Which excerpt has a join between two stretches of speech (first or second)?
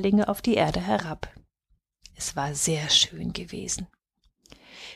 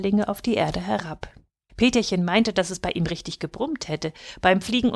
second